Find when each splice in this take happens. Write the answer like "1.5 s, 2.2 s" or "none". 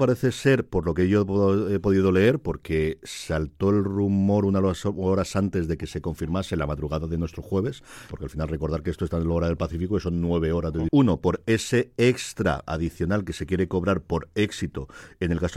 8.1 s, 10.9 s